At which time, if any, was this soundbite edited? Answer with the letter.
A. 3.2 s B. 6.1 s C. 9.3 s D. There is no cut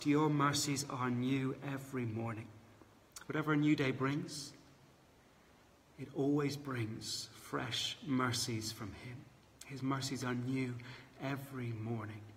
A